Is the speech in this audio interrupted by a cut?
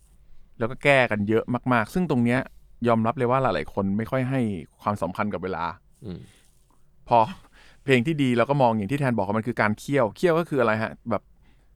no; 0 cuts

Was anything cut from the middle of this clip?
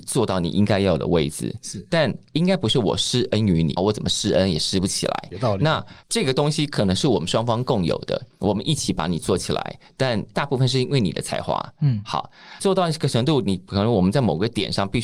yes; 1 cut; at 3.8 s

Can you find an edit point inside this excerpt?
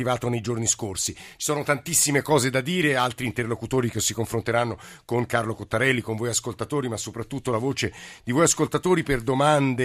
no; 0 cuts

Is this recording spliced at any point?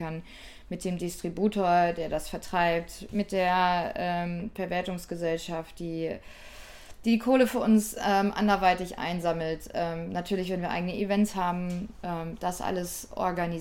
no; 0 cuts

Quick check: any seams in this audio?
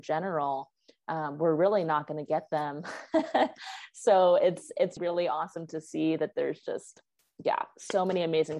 yes; 1 cut; at 5.0 s

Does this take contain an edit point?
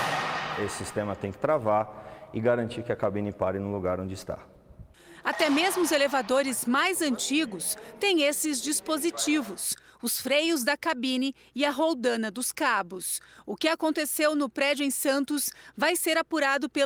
no; 0 cuts

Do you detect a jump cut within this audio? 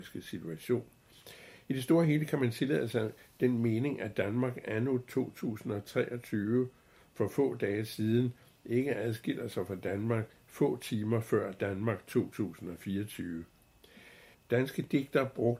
yes; 1 cut; at 14.3 s

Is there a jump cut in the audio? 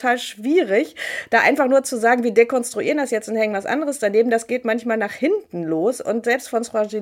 no; 0 cuts

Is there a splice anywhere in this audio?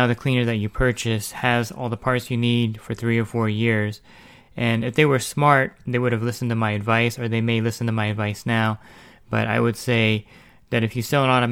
no; 0 cuts

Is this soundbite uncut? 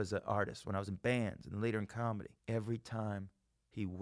no; 1 cut; at 2.4 s

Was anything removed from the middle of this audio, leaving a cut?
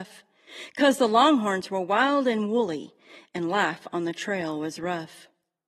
no; 0 cuts

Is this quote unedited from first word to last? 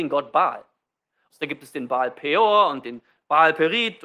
no; 1 cut; at 1.3 s

